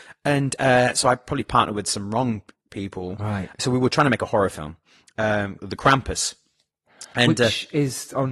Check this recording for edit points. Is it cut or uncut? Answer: cut